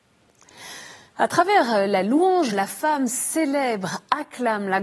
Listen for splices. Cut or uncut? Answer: cut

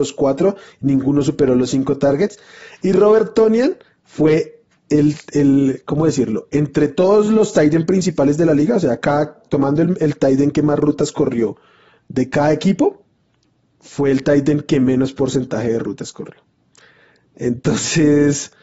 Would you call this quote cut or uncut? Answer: uncut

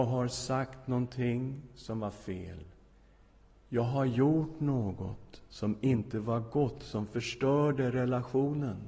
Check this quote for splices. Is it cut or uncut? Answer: uncut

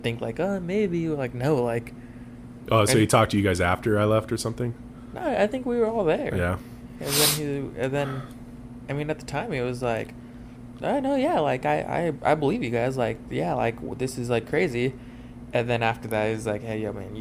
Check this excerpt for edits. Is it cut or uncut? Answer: cut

